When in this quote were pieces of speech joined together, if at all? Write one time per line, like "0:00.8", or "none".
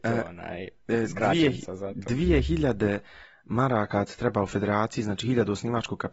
none